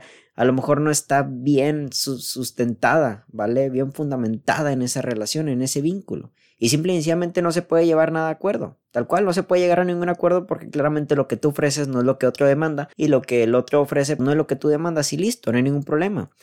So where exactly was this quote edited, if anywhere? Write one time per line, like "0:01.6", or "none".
0:08.8
0:12.9
0:14.2

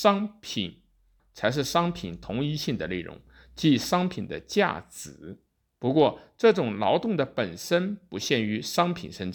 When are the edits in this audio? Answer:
0:01.2

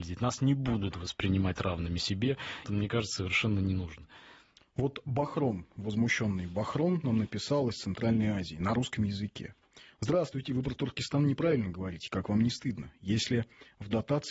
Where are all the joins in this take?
0:02.6

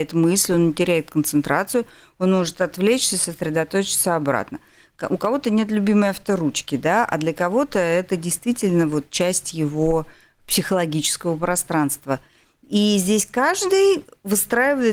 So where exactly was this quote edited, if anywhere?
none

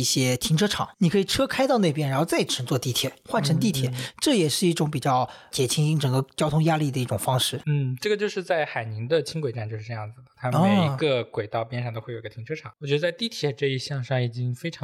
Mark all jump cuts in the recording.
0:00.9
0:12.7

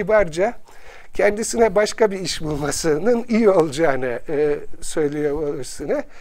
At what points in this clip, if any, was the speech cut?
none

